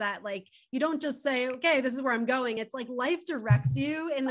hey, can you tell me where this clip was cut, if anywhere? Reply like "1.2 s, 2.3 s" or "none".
none